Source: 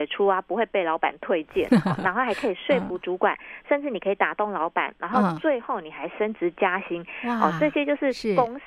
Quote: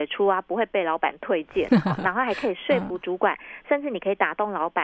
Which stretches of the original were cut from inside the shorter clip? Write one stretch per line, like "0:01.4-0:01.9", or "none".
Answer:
none